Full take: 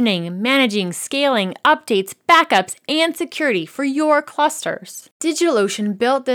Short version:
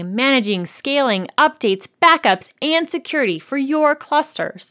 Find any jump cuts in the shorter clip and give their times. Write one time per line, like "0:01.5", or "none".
none